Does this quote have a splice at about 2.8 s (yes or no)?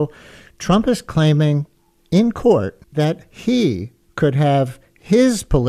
yes